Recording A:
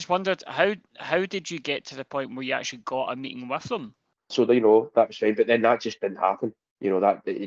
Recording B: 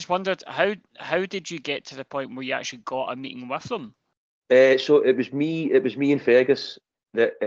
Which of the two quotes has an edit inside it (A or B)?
A